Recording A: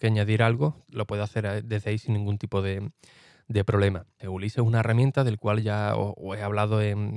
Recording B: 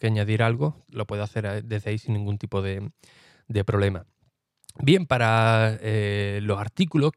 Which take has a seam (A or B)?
A